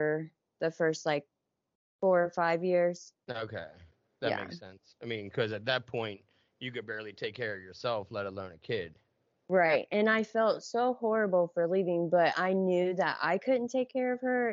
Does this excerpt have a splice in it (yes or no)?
yes